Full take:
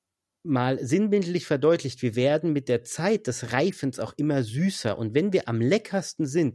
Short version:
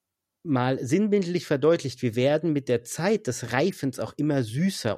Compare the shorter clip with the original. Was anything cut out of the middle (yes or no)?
no